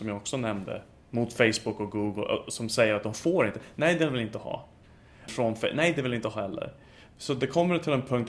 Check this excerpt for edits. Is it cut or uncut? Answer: cut